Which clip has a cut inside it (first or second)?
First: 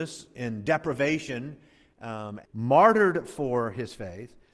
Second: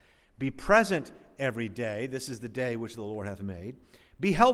first